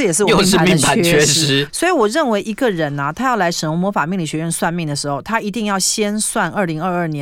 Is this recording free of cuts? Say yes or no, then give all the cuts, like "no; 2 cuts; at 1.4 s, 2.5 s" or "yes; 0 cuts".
no; 1 cut; at 1.7 s